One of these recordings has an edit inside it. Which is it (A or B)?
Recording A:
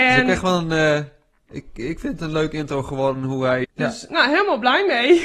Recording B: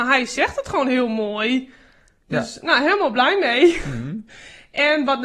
A